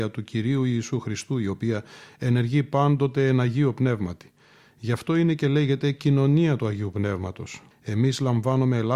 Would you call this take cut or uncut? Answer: cut